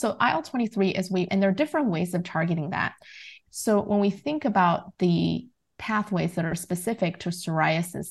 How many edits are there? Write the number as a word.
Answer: two